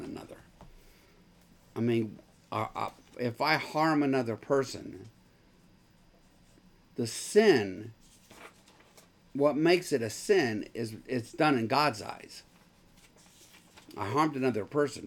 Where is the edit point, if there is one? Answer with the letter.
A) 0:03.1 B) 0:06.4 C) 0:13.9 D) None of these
A